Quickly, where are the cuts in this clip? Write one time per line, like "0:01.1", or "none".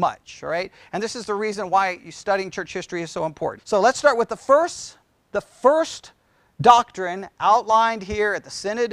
0:03.6